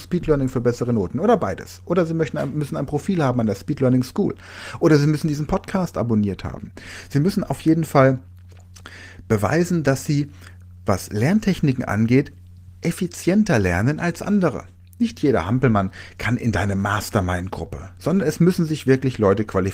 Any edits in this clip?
no; 0 cuts

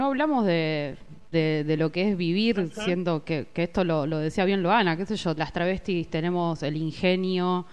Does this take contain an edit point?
yes; 2 cuts; at 1.3 s, 5.4 s

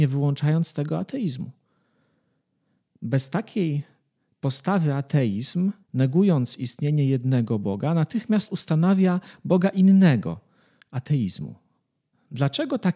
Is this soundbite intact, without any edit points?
no; 2 cuts; at 5.8 s, 10.8 s

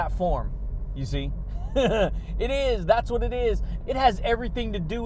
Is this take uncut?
no; 1 cut; at 3.8 s

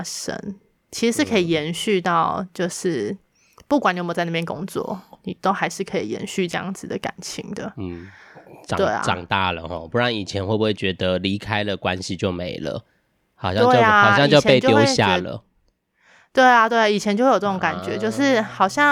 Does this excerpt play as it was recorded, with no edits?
yes; 0 cuts

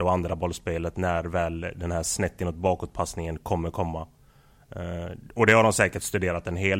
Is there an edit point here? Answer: no; 0 cuts

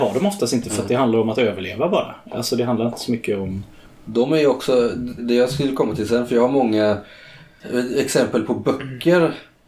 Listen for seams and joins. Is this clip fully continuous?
no; 1 cut; at 5.2 s

